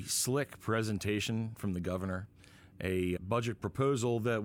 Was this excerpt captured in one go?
no; 1 cut; at 3.2 s

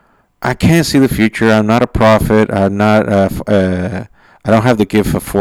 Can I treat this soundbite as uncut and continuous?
yes; 0 cuts

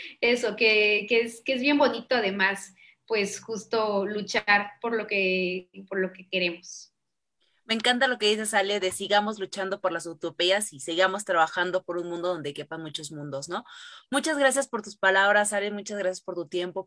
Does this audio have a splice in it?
no; 0 cuts

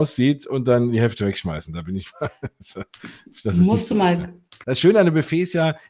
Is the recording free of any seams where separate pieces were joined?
no; 1 cut; at 4.6 s

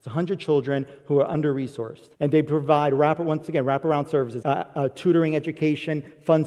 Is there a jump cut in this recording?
yes; 2 cuts; at 2.1 s, 4.4 s

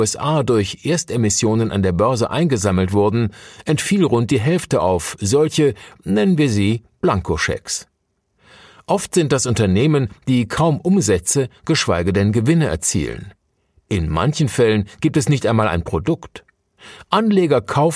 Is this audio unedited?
yes; 0 cuts

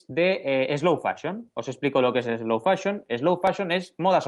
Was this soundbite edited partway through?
no; 0 cuts

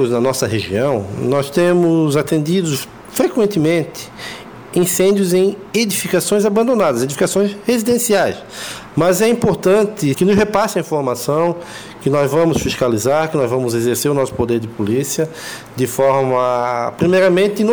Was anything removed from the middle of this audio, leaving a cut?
yes; 2 cuts; at 8.9 s, 10.1 s

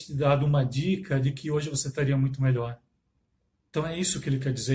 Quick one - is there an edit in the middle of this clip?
no; 0 cuts

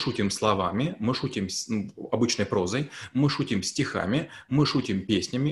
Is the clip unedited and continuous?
yes; 0 cuts

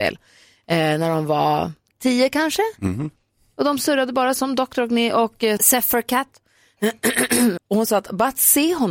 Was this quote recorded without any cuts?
no; 2 cuts; at 5.6 s, 7.6 s

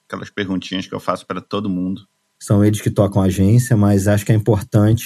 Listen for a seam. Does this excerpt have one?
yes; 1 cut; at 2.4 s

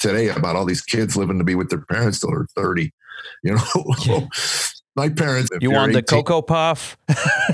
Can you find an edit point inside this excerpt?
yes; 2 cuts; at 4.0 s, 5.5 s

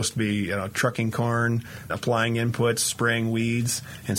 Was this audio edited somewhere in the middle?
yes; 1 cut; at 1.9 s

